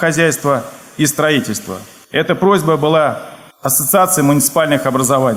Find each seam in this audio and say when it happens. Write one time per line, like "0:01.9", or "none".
none